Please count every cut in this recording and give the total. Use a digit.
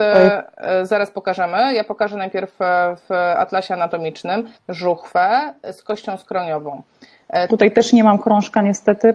2